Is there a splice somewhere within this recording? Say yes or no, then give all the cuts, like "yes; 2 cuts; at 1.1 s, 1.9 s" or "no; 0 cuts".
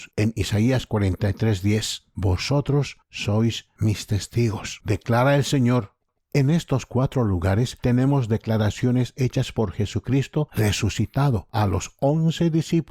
no; 0 cuts